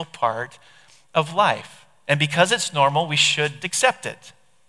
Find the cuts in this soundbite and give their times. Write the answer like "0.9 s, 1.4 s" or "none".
3.6 s